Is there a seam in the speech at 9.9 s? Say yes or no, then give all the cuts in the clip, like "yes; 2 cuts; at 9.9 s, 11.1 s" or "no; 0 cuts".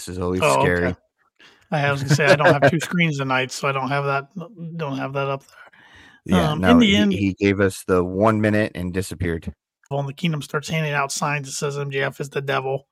yes; 1 cut; at 9.9 s